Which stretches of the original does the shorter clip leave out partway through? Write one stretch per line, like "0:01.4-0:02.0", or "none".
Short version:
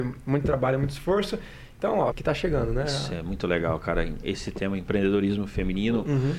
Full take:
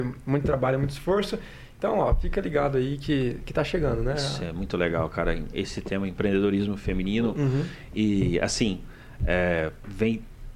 0:02.1-0:03.4